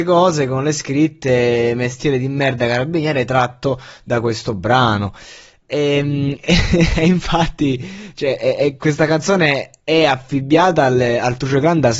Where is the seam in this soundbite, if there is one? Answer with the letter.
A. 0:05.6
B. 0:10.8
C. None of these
C